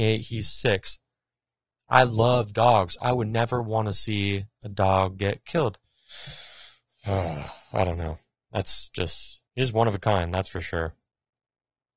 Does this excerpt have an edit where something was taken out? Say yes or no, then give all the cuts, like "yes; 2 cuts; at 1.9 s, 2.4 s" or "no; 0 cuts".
yes; 2 cuts; at 5.8 s, 9.5 s